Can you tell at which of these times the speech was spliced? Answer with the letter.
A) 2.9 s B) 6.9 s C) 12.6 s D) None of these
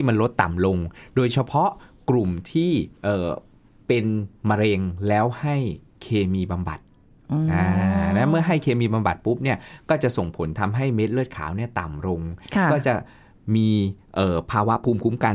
A